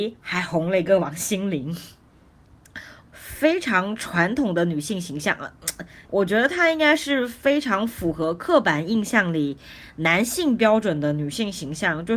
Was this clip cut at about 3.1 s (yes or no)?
yes